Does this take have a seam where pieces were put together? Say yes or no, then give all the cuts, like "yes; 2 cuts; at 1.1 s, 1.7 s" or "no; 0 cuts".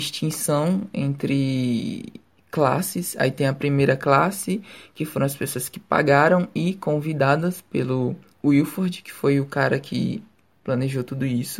no; 0 cuts